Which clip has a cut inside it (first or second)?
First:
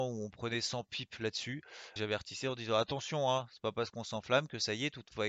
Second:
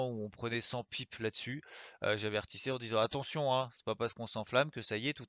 first